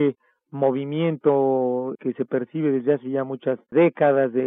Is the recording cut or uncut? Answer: cut